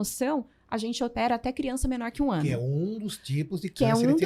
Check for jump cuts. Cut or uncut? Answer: uncut